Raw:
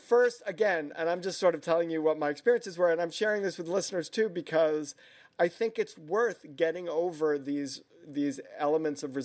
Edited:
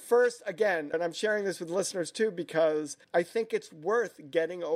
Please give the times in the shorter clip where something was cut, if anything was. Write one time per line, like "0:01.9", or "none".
0:00.9
0:03.0